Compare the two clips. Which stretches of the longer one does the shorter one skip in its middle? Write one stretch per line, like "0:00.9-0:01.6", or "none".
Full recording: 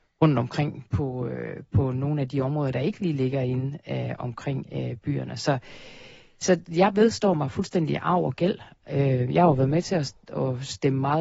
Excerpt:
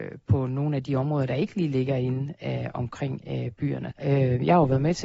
0:05.4-0:08.8